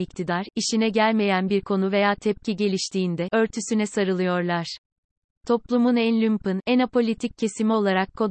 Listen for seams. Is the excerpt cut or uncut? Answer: cut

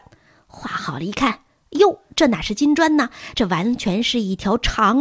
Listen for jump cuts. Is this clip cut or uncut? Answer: uncut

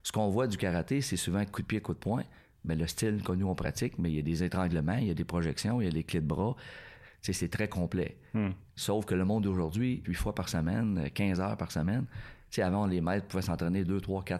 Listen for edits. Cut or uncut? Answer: cut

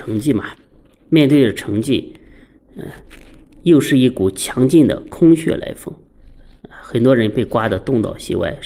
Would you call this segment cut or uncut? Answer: uncut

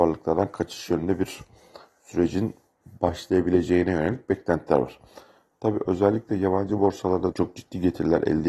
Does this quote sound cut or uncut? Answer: cut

